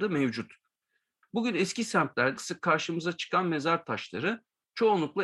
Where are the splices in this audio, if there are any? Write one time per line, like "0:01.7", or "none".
0:01.2
0:02.4